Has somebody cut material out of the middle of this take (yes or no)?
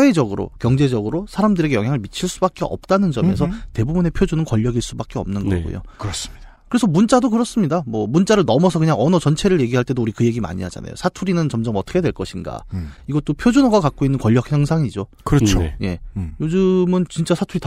no